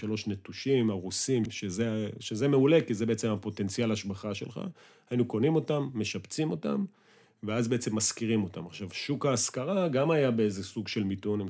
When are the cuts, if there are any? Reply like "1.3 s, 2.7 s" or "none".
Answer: 1.5 s